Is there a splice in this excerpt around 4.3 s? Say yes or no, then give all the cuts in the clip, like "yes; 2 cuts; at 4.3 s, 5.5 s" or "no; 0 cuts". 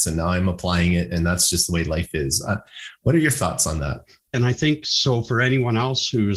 yes; 1 cut; at 4.3 s